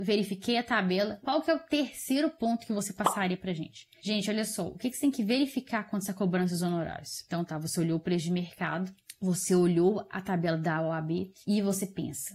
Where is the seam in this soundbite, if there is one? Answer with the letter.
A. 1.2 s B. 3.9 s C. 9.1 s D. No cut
D